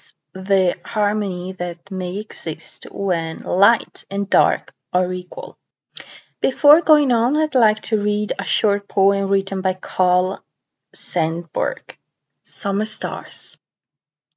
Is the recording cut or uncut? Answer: uncut